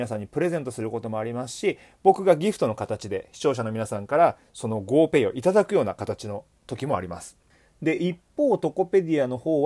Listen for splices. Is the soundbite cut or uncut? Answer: uncut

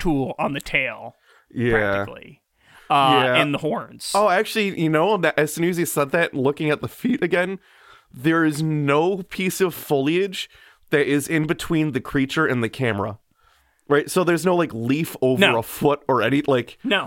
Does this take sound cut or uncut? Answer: uncut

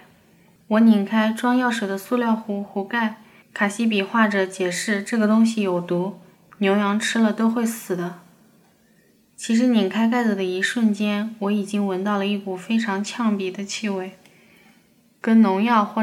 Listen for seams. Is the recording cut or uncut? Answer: cut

